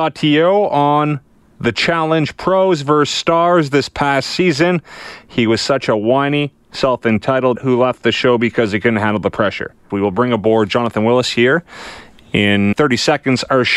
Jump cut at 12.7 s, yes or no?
yes